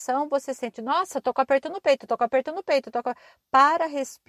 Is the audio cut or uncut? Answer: uncut